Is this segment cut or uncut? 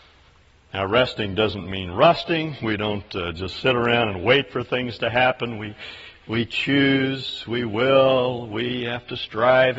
uncut